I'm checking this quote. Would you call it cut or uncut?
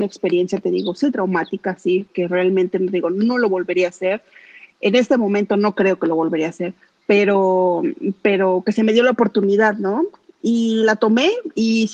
cut